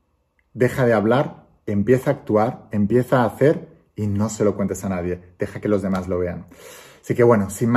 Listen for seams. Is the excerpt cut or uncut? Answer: uncut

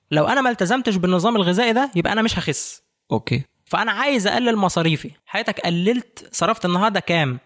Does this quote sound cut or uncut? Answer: cut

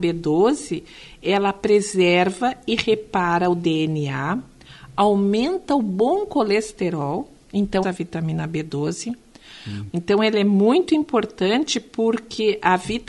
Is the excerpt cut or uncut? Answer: cut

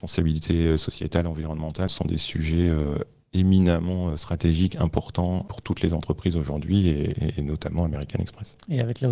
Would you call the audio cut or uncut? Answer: uncut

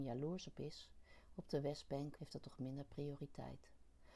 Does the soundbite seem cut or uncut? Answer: cut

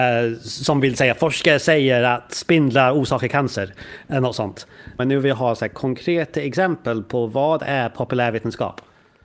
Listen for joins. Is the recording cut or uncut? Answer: cut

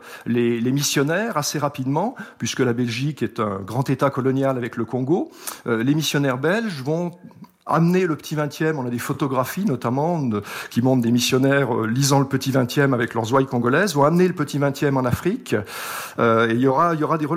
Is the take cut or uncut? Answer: uncut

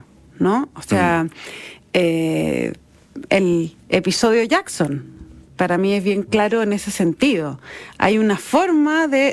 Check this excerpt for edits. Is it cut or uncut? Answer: uncut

